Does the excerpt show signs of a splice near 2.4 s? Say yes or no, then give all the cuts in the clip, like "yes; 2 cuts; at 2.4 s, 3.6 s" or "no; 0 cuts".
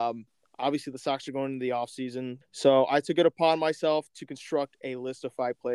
yes; 1 cut; at 2.4 s